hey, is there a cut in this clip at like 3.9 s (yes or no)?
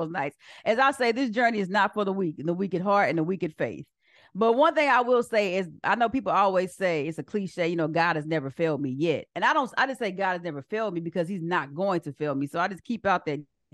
no